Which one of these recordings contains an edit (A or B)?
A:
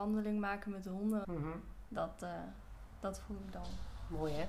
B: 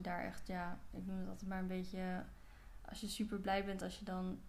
A